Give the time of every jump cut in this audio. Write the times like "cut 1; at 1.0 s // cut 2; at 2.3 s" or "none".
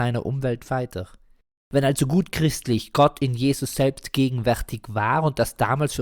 none